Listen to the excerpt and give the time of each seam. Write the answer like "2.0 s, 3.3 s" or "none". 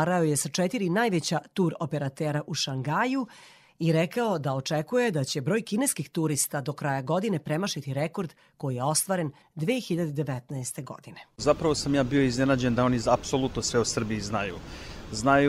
none